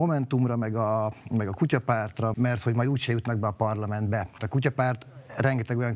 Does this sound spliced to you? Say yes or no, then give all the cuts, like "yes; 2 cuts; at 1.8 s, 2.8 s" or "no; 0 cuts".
yes; 2 cuts; at 2.3 s, 4.4 s